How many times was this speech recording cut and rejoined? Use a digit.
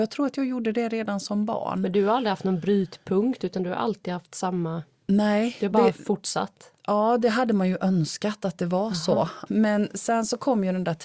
1